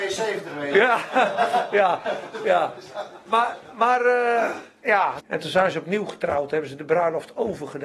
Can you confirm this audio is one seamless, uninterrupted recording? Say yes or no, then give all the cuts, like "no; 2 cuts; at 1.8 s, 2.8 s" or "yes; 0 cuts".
no; 1 cut; at 5.2 s